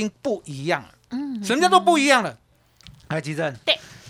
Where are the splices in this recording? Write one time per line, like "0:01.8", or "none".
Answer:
none

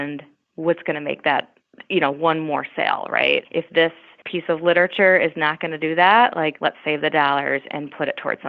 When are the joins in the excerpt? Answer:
0:06.6

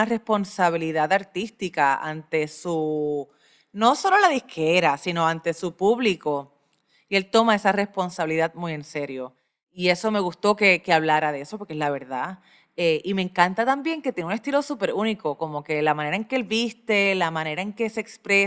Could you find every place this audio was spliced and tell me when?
none

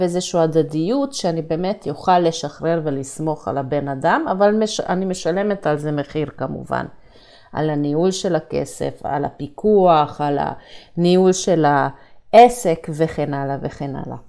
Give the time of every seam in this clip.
none

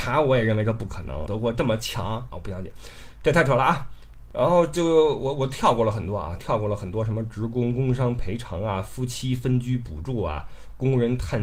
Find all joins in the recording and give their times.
0:01.3
0:02.3

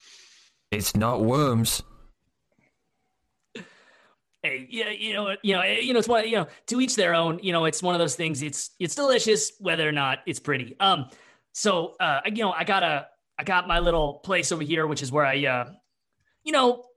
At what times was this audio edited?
none

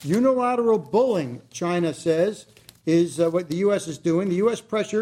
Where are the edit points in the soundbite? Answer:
none

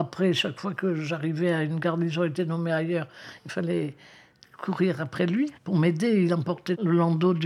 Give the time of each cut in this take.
0:05.6

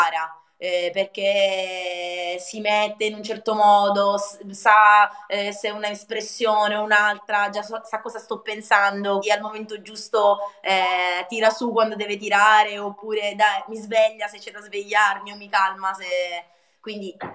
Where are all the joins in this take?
0:09.2

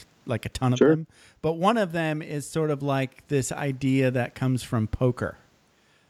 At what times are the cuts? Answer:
none

